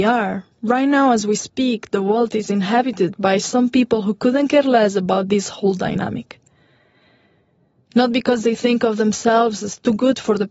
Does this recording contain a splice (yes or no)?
no